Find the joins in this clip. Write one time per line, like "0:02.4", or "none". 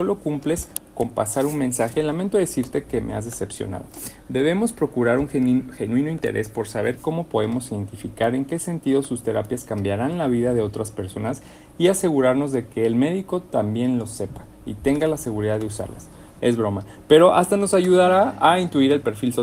0:16.4